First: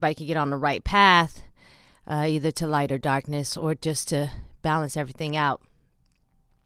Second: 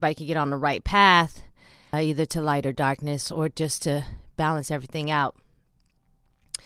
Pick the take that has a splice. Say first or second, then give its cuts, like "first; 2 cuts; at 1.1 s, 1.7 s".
second; 1 cut; at 1.9 s